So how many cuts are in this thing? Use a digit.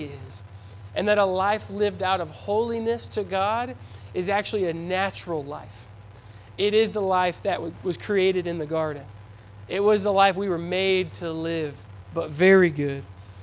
1